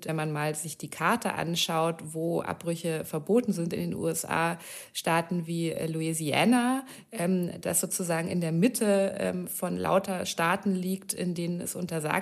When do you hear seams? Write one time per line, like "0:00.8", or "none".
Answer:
none